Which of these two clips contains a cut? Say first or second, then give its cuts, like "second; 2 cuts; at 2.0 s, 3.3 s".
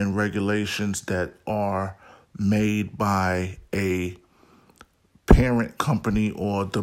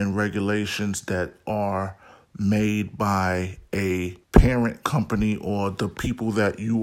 second; 1 cut; at 4.2 s